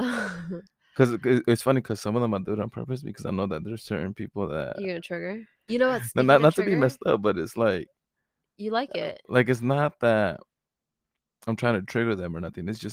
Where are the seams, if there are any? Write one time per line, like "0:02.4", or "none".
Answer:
0:05.7